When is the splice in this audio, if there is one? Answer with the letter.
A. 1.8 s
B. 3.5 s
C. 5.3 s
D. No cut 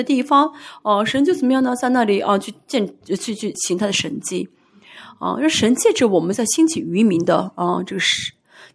B